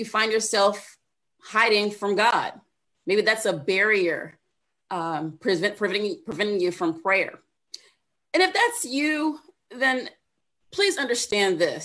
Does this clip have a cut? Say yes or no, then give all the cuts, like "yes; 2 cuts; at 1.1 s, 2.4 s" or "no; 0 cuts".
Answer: no; 0 cuts